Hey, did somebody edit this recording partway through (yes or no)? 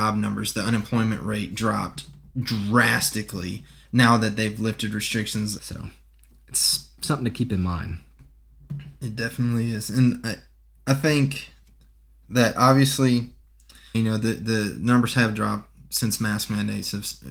yes